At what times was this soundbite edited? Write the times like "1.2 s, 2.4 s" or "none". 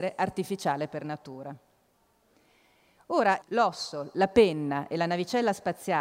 3.4 s